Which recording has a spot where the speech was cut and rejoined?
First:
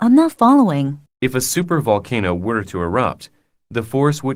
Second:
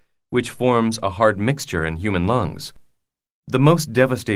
first; 1 cut; at 1.1 s

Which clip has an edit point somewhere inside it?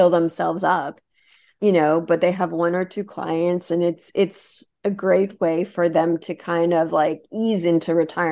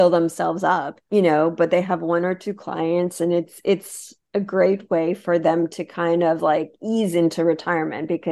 second; 1 cut; at 1.1 s

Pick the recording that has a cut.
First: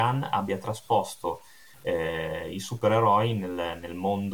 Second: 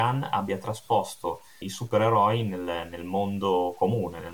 second; 1 cut; at 1.6 s

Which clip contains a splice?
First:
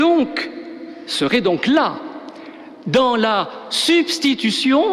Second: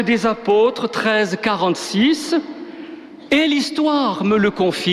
second; 1 cut; at 3.3 s

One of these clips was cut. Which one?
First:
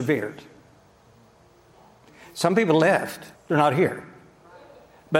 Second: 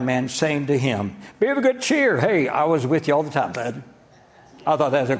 first; 1 cut; at 3.3 s

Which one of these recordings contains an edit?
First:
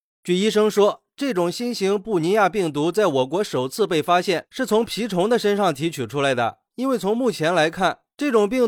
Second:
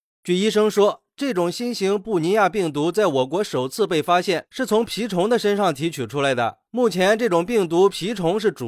first; 1 cut; at 6.7 s

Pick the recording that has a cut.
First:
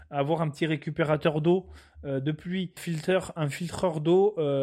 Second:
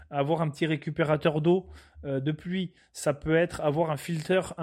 first; 1 cut; at 2.8 s

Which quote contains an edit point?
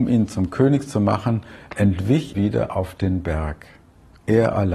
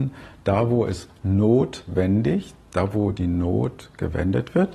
first; 1 cut; at 2.3 s

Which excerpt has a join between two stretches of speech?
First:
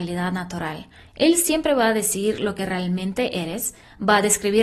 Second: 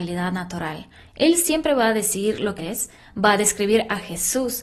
second; 1 cut; at 2.6 s

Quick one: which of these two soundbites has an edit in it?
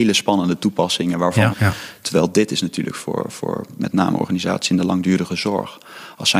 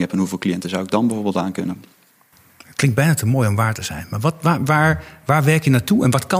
first; 1 cut; at 1.5 s

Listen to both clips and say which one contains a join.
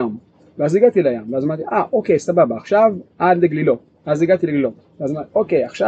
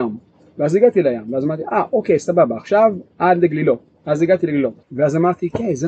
second; 1 cut; at 4.8 s

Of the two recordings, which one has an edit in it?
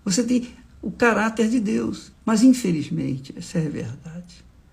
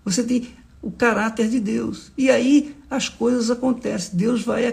first; 1 cut; at 2.1 s

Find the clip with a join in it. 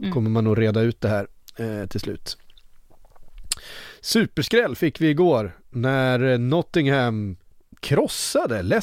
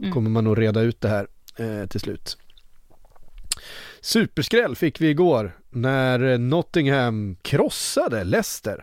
second; 1 cut; at 7.4 s

